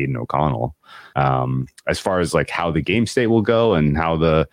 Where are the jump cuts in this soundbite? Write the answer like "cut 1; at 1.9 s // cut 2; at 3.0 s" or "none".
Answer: cut 1; at 1.1 s